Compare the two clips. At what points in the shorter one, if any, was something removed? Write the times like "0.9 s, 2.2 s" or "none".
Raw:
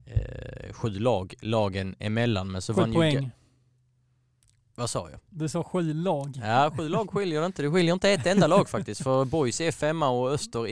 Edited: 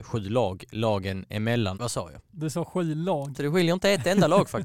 1.7 s, 3.3 s